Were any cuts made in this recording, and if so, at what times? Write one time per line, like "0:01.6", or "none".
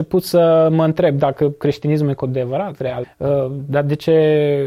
0:03.0